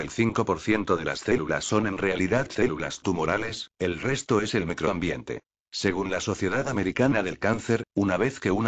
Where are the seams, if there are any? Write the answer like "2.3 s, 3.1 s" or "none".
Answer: 5.6 s